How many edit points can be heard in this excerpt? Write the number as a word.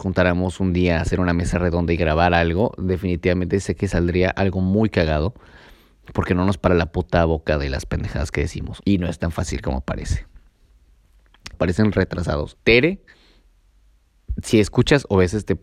three